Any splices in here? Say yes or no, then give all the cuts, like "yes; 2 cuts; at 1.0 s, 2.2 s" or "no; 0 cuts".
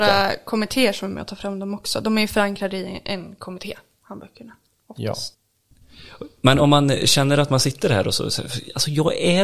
no; 0 cuts